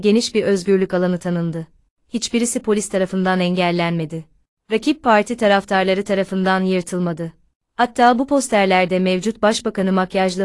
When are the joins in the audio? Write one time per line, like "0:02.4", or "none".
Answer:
0:02.0